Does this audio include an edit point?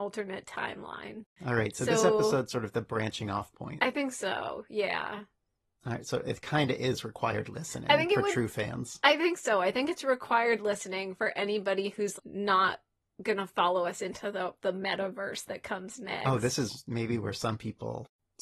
yes; 1 cut; at 12.2 s

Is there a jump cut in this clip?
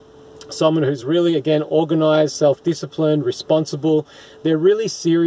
no; 0 cuts

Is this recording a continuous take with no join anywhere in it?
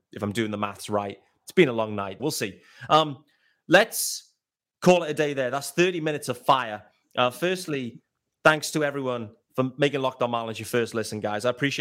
no; 1 cut; at 2.2 s

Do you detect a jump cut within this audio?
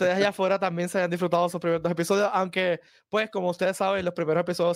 no; 0 cuts

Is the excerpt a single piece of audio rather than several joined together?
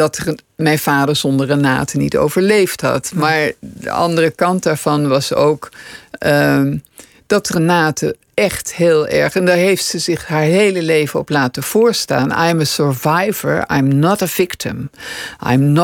yes; 0 cuts

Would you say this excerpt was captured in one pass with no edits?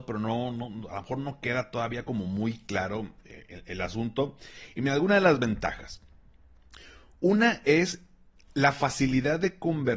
yes; 0 cuts

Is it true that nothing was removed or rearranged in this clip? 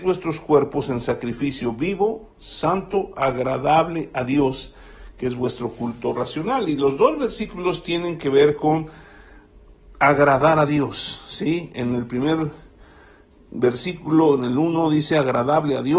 yes; 0 cuts

